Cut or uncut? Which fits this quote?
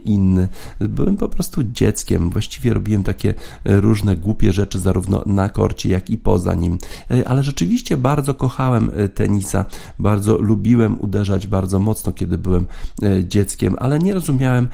uncut